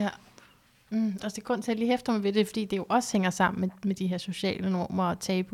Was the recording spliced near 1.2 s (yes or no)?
yes